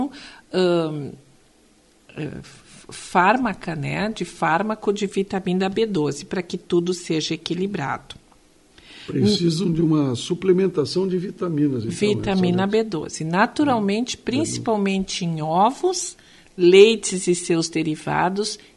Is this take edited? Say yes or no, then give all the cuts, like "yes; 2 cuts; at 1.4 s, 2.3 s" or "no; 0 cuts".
no; 0 cuts